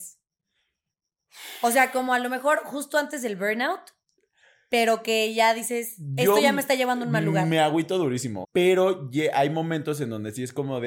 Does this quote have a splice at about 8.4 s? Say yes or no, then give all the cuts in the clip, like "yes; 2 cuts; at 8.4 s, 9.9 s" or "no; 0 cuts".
yes; 1 cut; at 8.4 s